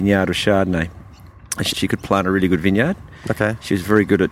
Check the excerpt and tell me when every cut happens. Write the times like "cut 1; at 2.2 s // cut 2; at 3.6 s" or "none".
cut 1; at 1.7 s